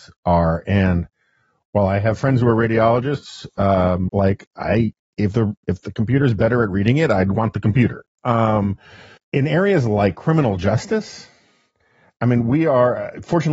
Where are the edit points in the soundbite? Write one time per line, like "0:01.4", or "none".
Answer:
0:04.1
0:09.2